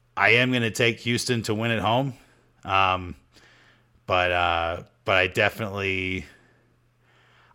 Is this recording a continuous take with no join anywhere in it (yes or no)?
yes